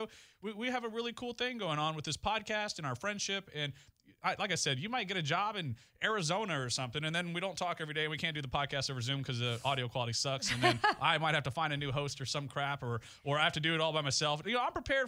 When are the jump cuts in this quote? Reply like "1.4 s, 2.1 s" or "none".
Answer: none